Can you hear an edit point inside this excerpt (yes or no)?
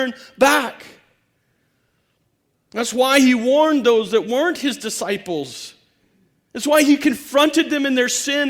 no